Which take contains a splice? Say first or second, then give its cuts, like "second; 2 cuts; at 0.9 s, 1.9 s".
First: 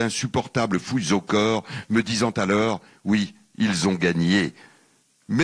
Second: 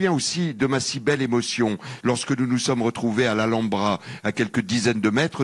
second; 1 cut; at 2.0 s